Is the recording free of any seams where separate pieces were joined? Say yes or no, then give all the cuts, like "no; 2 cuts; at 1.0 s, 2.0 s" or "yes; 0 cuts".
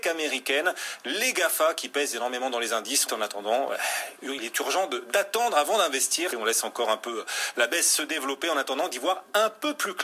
no; 2 cuts; at 3.1 s, 6.3 s